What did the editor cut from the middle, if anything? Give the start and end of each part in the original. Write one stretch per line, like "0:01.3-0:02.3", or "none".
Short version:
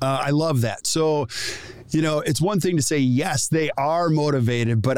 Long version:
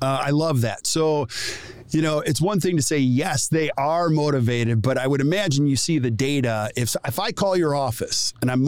none